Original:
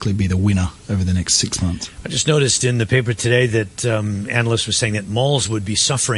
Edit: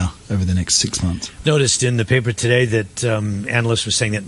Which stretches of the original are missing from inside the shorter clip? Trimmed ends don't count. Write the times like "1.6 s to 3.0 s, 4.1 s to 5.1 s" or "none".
2.0 s to 2.2 s

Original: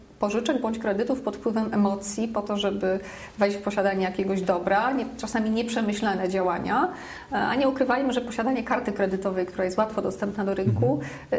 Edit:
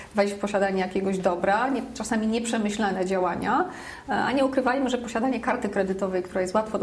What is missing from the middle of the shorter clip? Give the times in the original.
none

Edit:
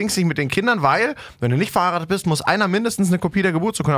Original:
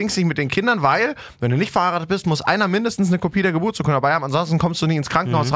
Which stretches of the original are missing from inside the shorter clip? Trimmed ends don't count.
none

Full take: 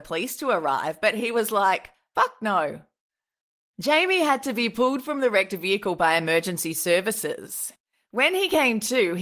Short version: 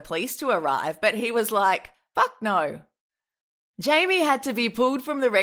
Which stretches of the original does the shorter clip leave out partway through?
none

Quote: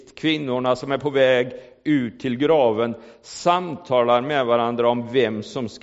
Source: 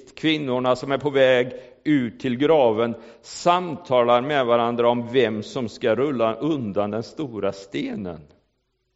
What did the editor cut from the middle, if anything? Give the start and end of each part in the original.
none

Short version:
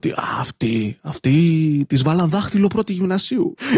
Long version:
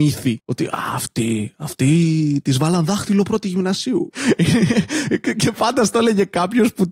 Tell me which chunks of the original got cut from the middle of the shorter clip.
none

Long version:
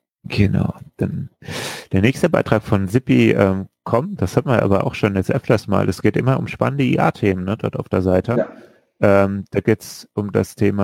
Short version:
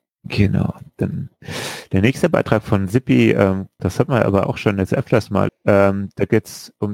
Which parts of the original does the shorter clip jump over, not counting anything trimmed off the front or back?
3.8 s to 4.2 s, 5.9 s to 8.8 s

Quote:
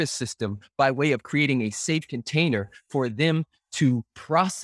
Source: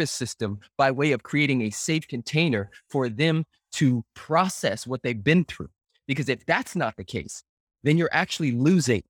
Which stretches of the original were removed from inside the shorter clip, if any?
none

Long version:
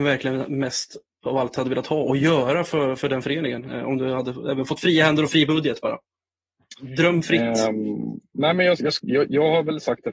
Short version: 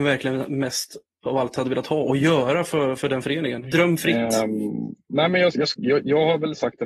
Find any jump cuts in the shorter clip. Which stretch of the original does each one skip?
3.6 s to 6.9 s

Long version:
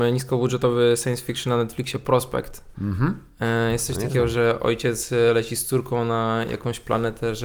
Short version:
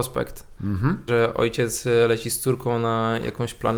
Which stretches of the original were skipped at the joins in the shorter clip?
3.2 s to 4.3 s

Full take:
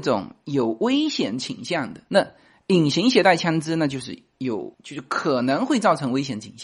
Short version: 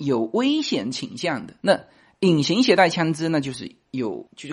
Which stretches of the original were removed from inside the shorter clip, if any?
none

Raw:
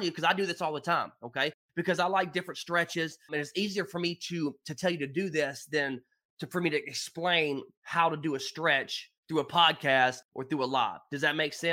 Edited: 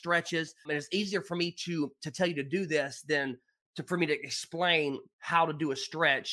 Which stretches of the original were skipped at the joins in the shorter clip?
none

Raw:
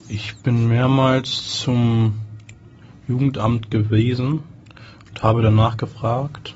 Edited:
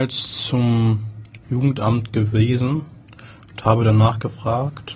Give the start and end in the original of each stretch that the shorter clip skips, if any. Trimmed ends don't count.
2.6 s to 3.0 s

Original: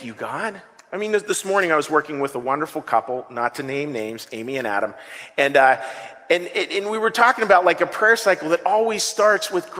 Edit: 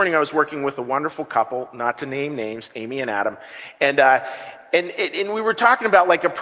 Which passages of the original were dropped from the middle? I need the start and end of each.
none

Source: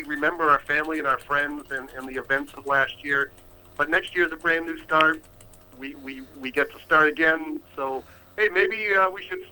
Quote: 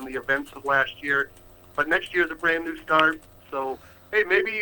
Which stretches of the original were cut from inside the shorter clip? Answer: 5.4 s to 7.6 s

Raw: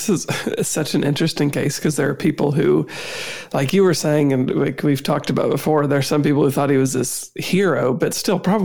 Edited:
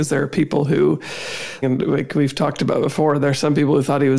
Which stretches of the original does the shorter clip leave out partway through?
3.5 s to 4.3 s

